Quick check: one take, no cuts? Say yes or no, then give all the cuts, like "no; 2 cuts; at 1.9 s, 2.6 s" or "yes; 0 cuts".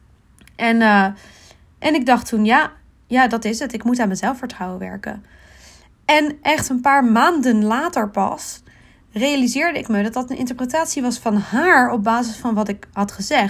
yes; 0 cuts